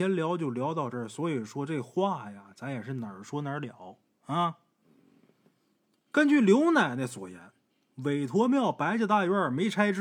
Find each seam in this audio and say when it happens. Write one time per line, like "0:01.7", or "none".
none